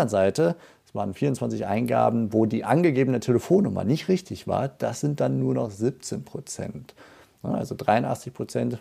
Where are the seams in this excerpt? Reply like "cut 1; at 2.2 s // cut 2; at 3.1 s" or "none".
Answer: none